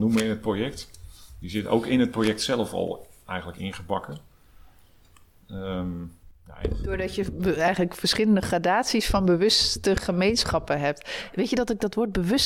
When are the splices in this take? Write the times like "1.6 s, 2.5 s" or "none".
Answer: none